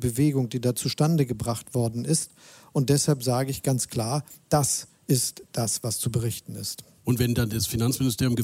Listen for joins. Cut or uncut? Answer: uncut